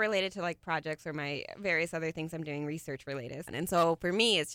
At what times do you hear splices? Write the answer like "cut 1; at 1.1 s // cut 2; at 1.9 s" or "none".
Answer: cut 1; at 3.5 s